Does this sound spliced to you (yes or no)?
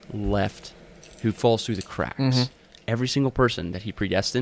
no